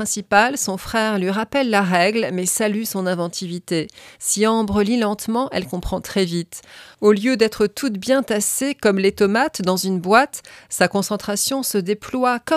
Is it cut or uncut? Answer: uncut